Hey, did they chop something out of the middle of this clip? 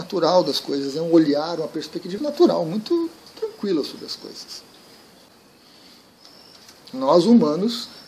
yes; 2 cuts; at 2.2 s, 6.9 s

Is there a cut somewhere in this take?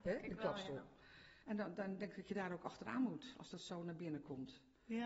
yes; 1 cut; at 1.4 s

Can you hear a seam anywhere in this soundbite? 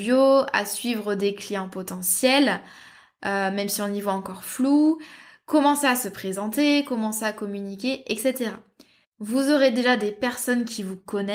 yes; 1 cut; at 9.0 s

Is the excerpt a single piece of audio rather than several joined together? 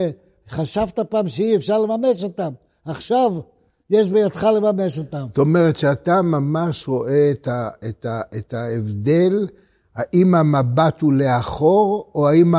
yes; 0 cuts

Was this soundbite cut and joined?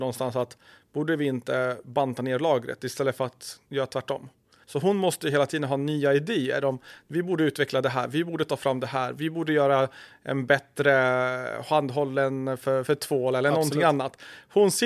yes; 1 cut; at 4.6 s

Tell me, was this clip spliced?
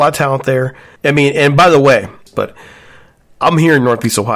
yes; 2 cuts; at 1.0 s, 2.3 s

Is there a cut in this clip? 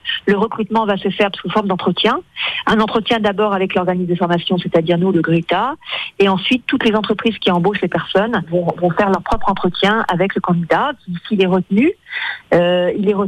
no; 0 cuts

